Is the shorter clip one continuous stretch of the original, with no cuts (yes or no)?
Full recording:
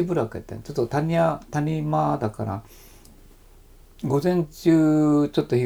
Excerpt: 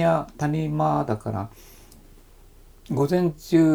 yes